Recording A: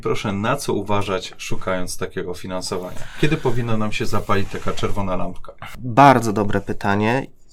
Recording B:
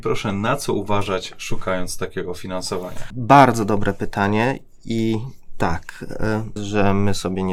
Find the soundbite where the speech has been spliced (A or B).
B